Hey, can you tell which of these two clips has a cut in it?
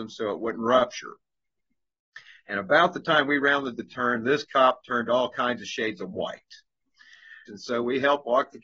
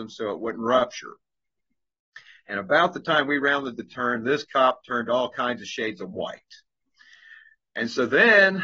first; 1 cut; at 7.5 s

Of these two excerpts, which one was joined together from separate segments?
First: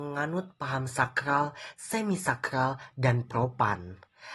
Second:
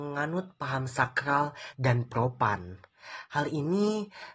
second; 1 cut; at 1.7 s

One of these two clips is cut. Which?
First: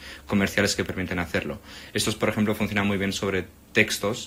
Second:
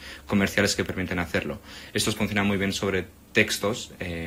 second; 1 cut; at 2.2 s

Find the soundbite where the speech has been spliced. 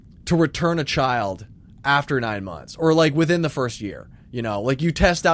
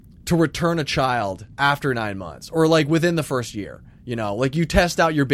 second; 1 cut; at 1.5 s

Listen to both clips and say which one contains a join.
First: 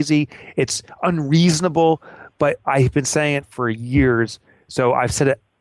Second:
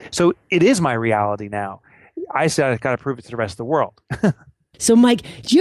first; 1 cut; at 3.4 s

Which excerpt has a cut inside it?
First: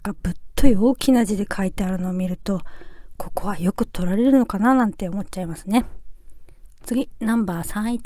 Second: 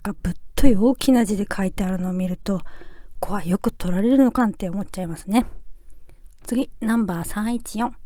second; 2 cuts; at 3.2 s, 4.4 s

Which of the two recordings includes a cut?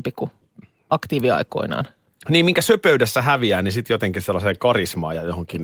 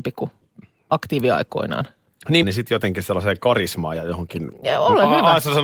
second; 2 cuts; at 2.4 s, 4.5 s

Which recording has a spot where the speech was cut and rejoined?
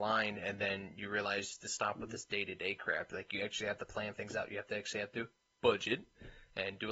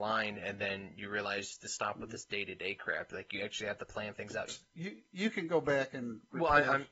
second; 1 cut; at 4.5 s

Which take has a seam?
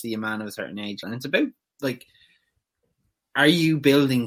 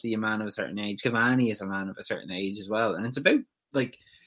first; 1 cut; at 1.0 s

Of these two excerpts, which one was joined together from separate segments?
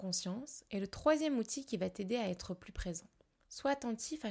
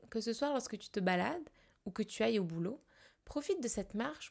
first; 1 cut; at 3.4 s

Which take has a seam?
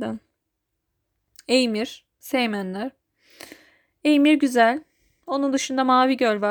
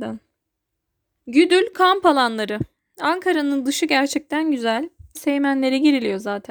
second; 2 cuts; at 1.2 s, 5.1 s

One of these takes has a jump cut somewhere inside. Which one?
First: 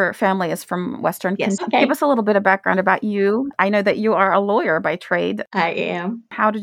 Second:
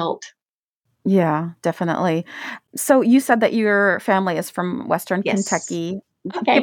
first; 1 cut; at 1.6 s

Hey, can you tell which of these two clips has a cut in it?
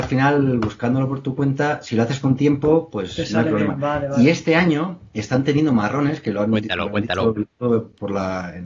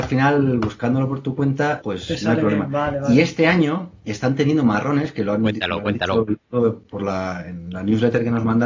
second; 1 cut; at 1.8 s

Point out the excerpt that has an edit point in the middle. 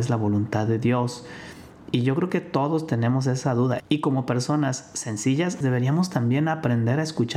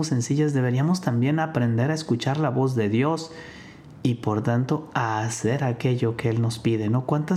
first; 2 cuts; at 3.8 s, 5.6 s

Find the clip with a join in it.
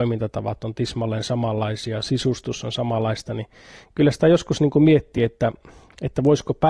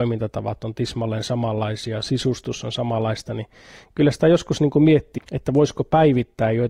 second; 1 cut; at 5.2 s

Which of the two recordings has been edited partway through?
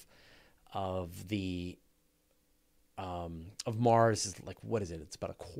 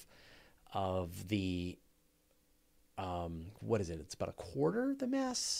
second; 1 cut; at 3.5 s

